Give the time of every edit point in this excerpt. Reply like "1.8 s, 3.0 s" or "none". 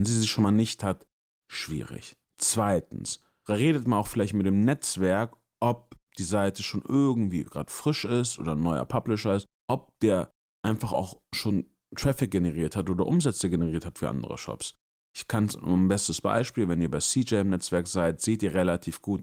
2.2 s